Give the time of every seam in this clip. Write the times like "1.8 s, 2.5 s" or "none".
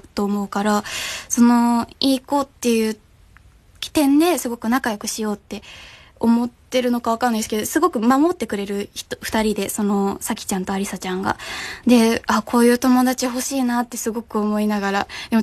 none